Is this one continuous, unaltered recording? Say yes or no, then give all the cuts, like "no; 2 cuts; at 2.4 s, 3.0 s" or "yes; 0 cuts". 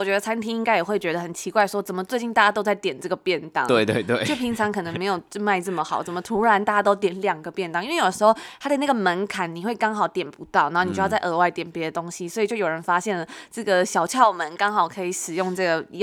yes; 0 cuts